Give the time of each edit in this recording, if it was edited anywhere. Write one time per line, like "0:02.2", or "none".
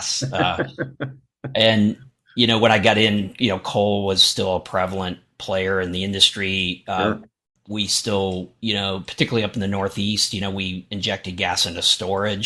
0:07.6